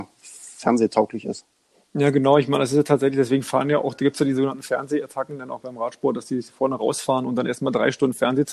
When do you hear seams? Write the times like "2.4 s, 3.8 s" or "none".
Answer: none